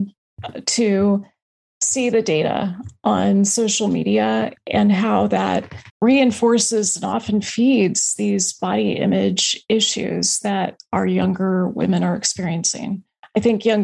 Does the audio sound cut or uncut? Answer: cut